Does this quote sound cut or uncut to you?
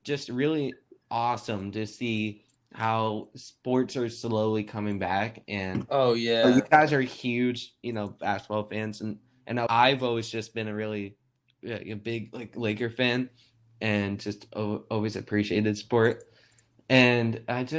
cut